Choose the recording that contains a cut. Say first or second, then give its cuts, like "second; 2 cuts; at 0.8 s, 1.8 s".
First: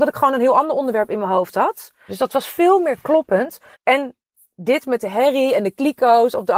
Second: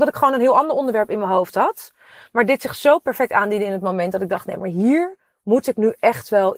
first; 2 cuts; at 2.1 s, 3.7 s